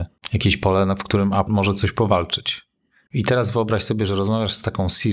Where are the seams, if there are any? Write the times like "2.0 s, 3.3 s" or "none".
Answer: 1.5 s, 3.1 s